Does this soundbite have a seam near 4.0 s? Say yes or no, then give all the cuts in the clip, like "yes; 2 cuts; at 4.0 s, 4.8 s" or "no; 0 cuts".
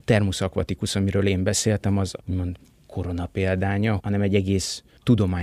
yes; 2 cuts; at 2.2 s, 4.0 s